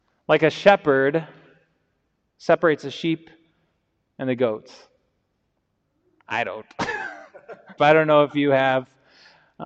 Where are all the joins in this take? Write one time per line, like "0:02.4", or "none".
0:06.2
0:07.8